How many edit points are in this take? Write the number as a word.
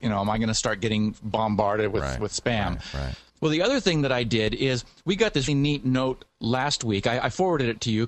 two